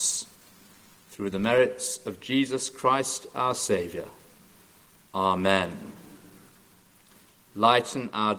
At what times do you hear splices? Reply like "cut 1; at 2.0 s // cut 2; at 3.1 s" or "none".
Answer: none